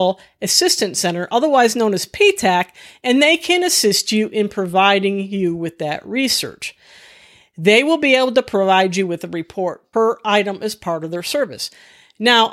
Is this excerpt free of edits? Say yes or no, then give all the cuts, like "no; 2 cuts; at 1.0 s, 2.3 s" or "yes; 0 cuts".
yes; 0 cuts